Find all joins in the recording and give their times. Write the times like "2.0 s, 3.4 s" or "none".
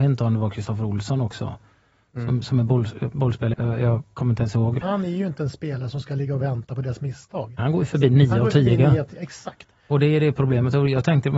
3.5 s, 4.8 s, 7.6 s

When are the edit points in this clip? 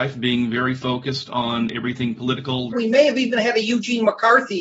2.7 s

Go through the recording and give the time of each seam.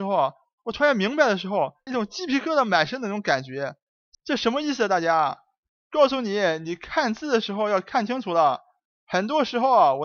1.9 s, 4.1 s

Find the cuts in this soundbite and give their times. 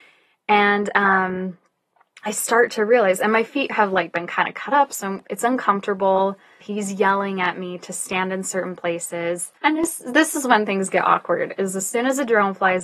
4.9 s, 6.6 s, 9.6 s

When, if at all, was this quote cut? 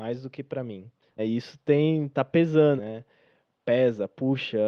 1.2 s, 2.8 s

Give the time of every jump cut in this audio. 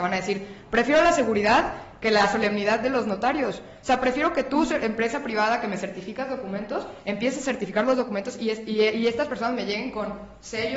none

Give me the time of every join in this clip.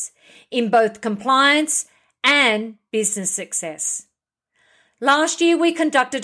none

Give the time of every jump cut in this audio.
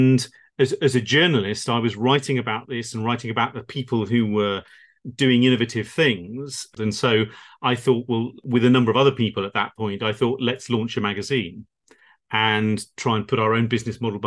6.8 s

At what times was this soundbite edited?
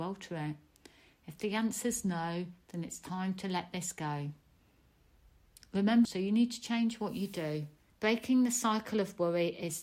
6.0 s, 7.9 s

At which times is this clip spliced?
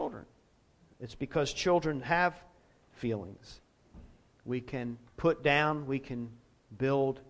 4.3 s

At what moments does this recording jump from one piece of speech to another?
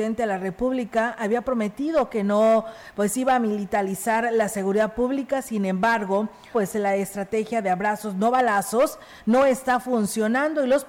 6.5 s

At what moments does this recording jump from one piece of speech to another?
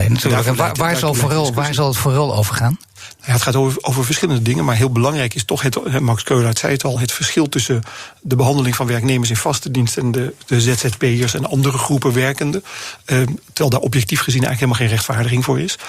none

